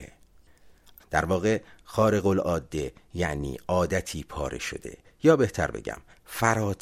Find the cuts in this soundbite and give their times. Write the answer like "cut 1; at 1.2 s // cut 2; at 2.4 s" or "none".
cut 1; at 1.0 s